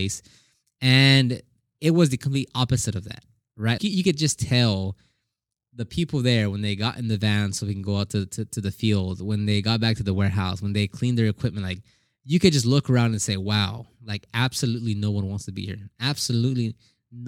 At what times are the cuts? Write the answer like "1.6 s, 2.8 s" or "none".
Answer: 3.8 s